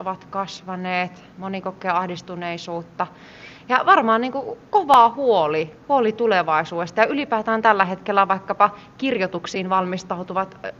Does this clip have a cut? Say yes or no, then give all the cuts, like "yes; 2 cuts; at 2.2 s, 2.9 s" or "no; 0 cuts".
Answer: yes; 1 cut; at 1.3 s